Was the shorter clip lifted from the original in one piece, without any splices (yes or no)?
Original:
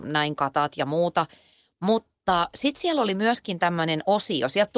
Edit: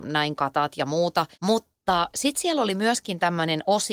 no